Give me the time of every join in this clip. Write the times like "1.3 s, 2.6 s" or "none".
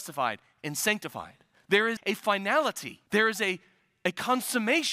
2.0 s, 3.1 s

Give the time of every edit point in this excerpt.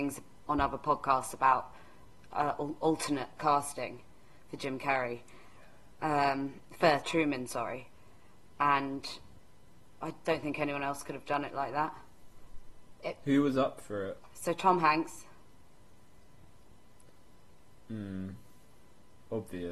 10.2 s

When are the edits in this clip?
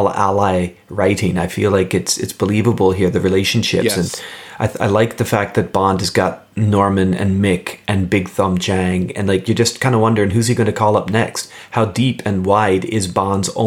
none

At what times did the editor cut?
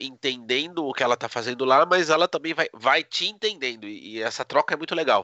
none

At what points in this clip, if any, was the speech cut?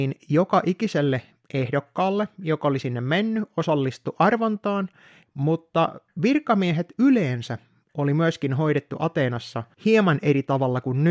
5.3 s, 9.7 s

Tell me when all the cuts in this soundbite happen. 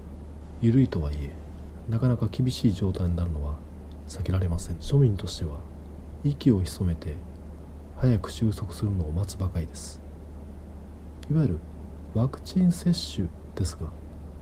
4.8 s

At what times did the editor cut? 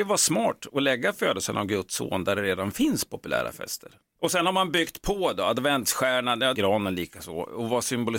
4.1 s, 6.5 s

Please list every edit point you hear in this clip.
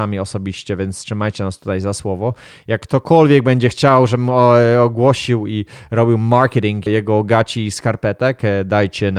6.9 s

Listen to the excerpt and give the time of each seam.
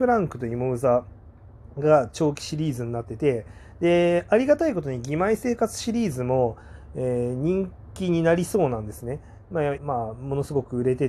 9.8 s

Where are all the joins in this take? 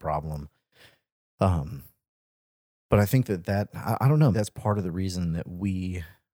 4.3 s

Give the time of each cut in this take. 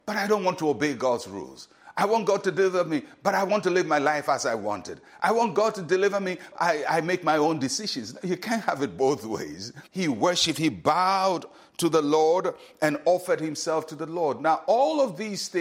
6.5 s, 9.9 s

